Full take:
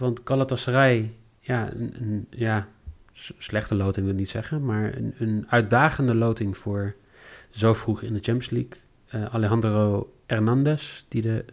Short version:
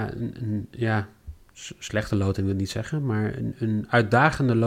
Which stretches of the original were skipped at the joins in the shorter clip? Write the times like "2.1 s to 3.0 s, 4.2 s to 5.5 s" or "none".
none